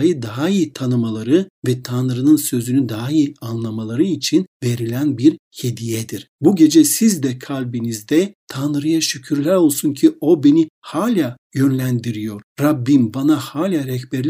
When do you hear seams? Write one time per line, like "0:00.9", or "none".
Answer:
0:06.3